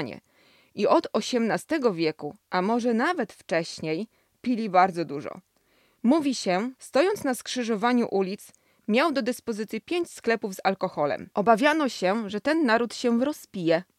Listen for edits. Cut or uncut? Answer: cut